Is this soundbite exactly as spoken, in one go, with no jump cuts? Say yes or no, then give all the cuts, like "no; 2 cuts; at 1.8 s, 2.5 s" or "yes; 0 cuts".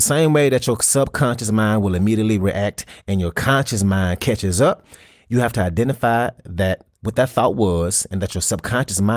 yes; 0 cuts